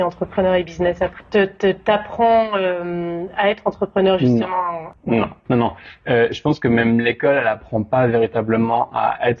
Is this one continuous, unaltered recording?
no; 1 cut; at 1.2 s

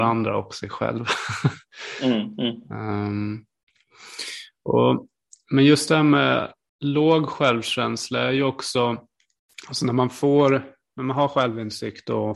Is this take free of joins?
yes; 0 cuts

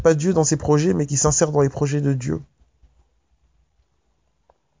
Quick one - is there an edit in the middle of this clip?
no; 0 cuts

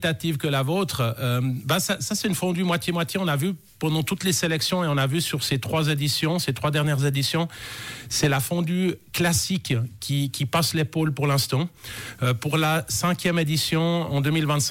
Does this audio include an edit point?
no; 0 cuts

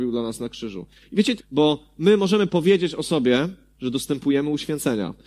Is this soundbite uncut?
no; 2 cuts; at 1.4 s, 3.7 s

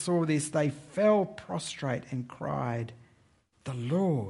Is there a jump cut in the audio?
no; 0 cuts

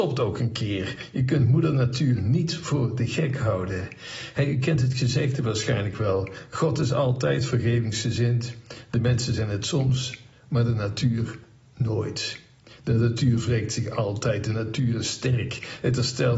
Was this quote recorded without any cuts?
yes; 0 cuts

